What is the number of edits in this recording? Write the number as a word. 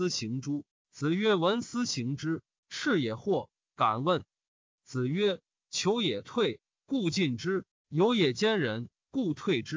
one